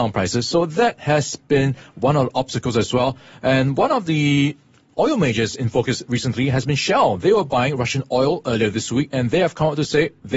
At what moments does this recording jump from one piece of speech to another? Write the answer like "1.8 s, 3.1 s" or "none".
none